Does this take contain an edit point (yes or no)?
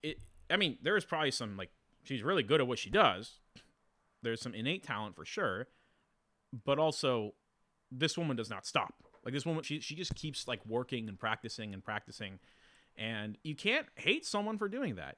yes